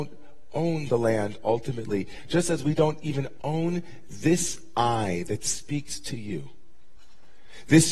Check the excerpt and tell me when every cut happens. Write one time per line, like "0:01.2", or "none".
none